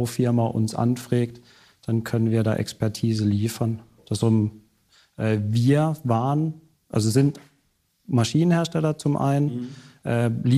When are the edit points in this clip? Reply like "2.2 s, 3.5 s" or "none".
4.0 s